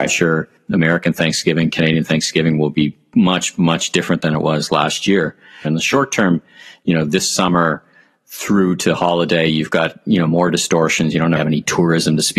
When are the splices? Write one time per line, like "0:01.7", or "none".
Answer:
0:05.6
0:11.4

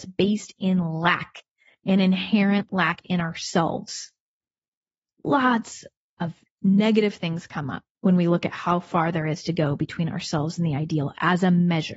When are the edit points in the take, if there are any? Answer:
0:05.1
0:07.9

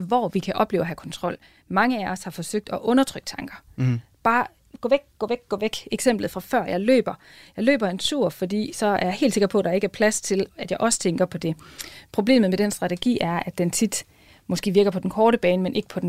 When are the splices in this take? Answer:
none

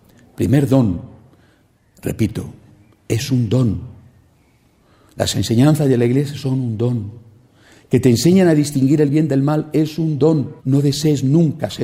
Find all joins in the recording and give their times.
0:10.6

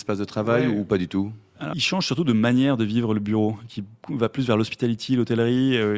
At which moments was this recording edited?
0:01.7

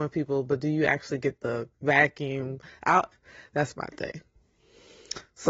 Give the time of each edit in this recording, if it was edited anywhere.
0:01.7
0:03.1

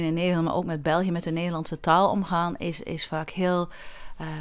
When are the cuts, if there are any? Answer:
none

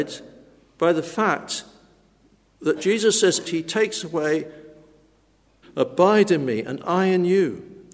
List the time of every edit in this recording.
0:03.4
0:05.6

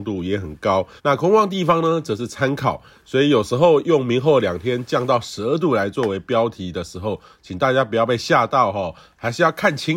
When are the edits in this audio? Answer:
0:01.0

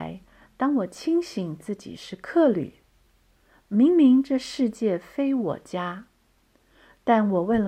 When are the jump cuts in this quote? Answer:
none

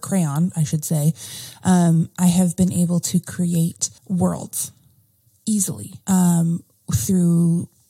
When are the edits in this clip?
0:04.0
0:06.0

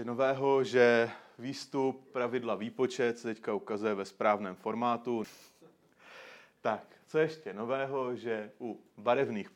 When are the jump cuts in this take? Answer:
0:05.2

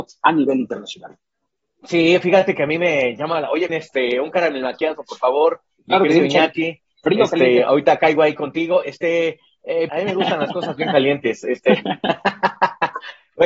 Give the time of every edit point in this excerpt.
0:03.7
0:09.9

